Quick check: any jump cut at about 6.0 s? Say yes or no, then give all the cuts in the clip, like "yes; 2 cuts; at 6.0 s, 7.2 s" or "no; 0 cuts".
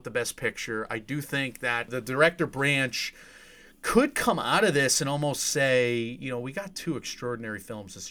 no; 0 cuts